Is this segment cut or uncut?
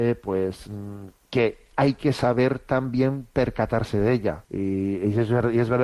cut